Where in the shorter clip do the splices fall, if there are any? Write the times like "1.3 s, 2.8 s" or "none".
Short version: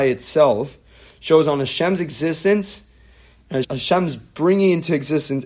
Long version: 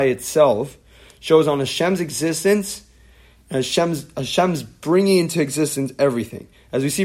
3.6 s